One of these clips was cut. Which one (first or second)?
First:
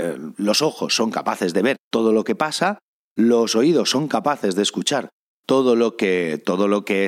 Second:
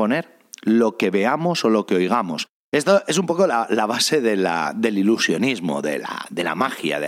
first